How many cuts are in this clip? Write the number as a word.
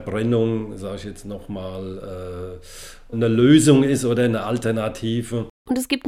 one